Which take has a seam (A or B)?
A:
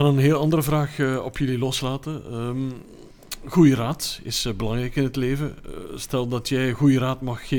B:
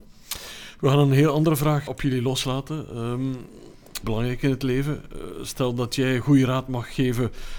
B